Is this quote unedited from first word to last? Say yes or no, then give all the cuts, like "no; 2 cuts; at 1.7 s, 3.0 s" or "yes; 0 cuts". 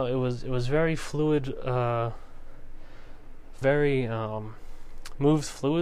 no; 1 cut; at 3.6 s